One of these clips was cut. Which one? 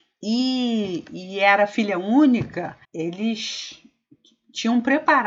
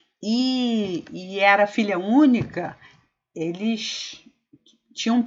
first; 1 cut; at 2.8 s

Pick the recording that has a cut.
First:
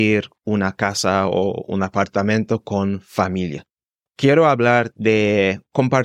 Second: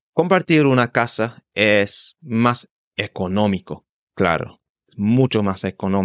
first; 1 cut; at 4.1 s

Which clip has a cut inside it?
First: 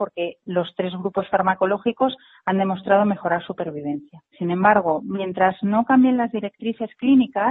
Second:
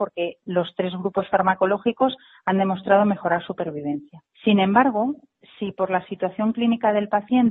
first; 1 cut; at 4.3 s

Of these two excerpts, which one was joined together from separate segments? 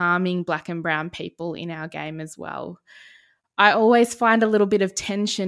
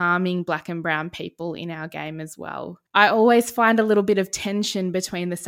second; 1 cut; at 2.9 s

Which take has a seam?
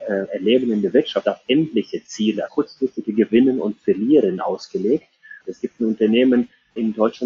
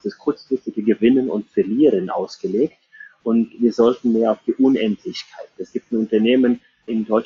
first; 2 cuts; at 2.5 s, 5.4 s

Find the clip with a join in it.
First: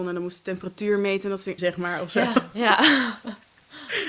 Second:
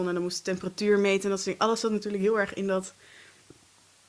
first; 1 cut; at 1.6 s

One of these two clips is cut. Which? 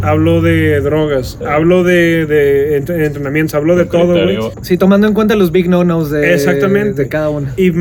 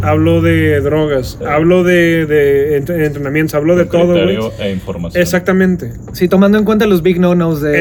first; 1 cut; at 4.5 s

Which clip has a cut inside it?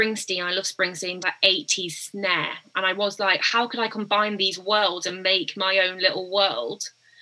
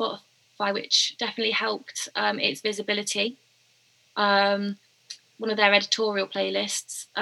first; 1 cut; at 1.2 s

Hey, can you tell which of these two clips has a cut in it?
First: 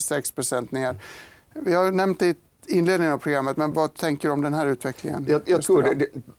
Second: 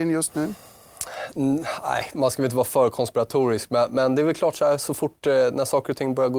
first; 1 cut; at 3.7 s

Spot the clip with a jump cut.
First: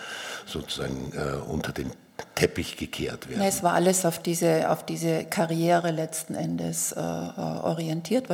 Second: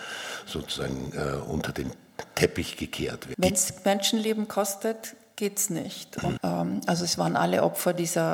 second; 2 cuts; at 3.3 s, 6.4 s

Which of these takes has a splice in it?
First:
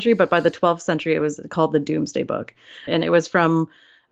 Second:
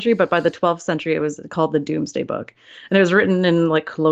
first; 1 cut; at 2.9 s

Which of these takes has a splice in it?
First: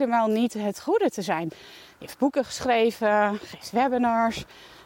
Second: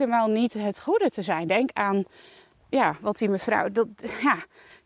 first; 1 cut; at 1.5 s

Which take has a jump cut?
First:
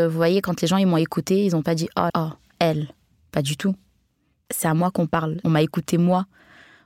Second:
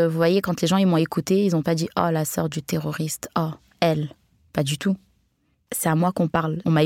first; 1 cut; at 2.1 s

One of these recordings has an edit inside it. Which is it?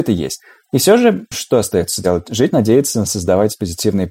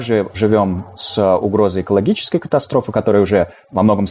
first; 1 cut; at 1.3 s

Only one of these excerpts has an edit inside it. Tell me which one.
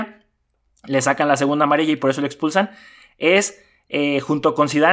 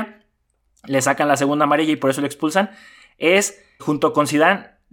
second; 1 cut; at 3.8 s

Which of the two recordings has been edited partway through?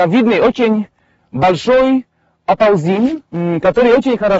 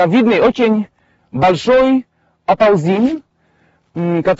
first; 1 cut; at 3.3 s

